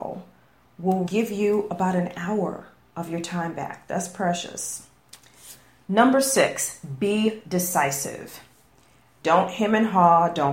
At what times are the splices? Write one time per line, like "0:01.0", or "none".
0:01.0
0:09.2